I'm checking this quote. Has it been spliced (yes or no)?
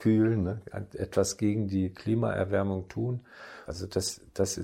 yes